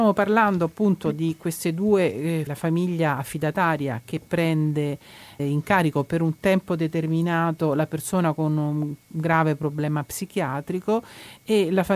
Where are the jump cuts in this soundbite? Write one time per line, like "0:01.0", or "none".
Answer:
0:02.5
0:05.4